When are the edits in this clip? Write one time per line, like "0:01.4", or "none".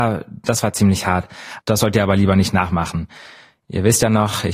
0:01.6